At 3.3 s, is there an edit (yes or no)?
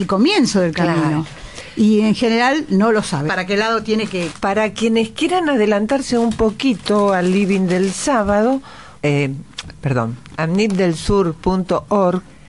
yes